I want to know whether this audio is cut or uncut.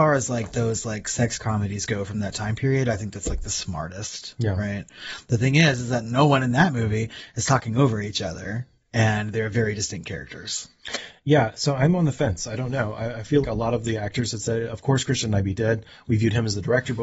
cut